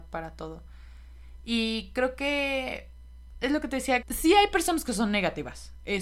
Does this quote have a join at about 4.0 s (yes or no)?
yes